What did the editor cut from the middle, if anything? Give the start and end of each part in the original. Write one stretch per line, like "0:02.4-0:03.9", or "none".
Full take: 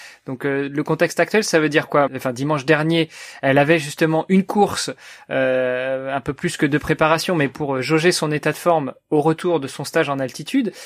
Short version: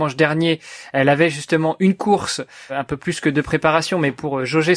0:05.2-0:06.1